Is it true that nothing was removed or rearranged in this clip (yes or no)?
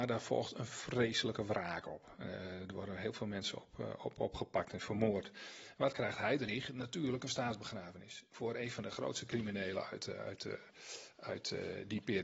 no